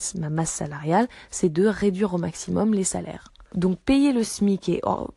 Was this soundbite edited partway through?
yes; 1 cut; at 3.5 s

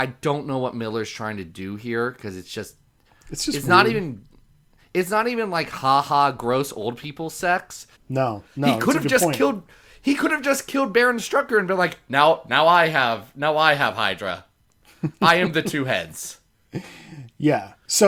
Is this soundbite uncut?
no; 1 cut; at 8.0 s

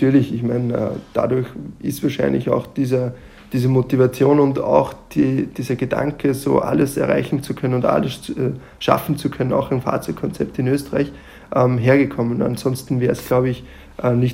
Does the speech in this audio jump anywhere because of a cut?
no; 0 cuts

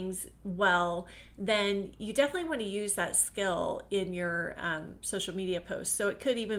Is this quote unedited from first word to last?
yes; 0 cuts

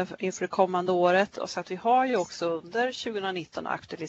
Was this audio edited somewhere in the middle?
yes; 1 cut; at 1.3 s

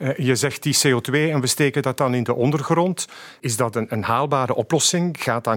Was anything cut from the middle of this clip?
no; 0 cuts

